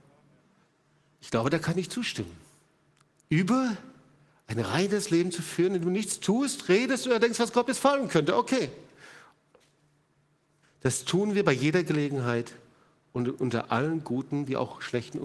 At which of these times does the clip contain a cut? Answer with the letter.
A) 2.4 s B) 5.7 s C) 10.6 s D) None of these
C